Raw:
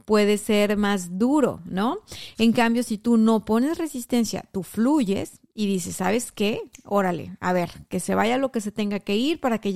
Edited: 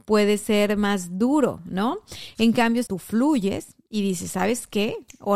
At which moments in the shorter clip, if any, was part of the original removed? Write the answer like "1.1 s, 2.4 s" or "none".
2.9 s